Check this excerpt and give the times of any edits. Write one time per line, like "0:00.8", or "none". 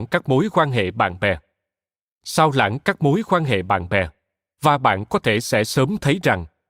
none